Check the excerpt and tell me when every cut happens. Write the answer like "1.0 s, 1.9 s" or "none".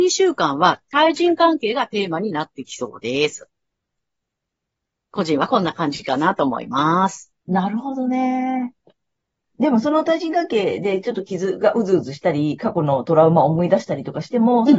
7.4 s